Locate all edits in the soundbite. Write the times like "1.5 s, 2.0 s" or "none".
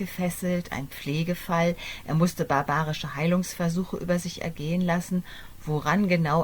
none